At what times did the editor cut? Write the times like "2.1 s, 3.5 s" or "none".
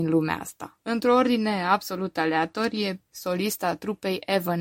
3.1 s